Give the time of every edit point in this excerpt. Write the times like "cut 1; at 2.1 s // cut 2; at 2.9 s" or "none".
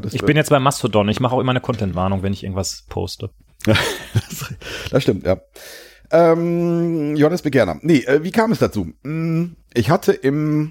none